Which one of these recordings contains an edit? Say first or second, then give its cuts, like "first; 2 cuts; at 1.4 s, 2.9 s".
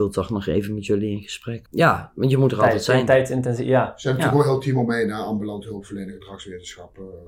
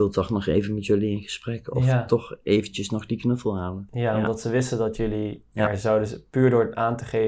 first; 1 cut; at 1.7 s